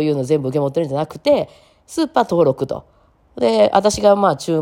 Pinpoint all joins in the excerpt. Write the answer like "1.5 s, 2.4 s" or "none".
none